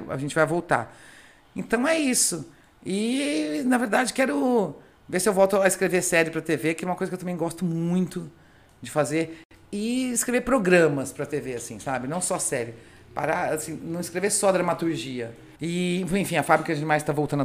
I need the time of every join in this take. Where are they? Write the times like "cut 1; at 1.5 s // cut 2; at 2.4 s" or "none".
cut 1; at 15.6 s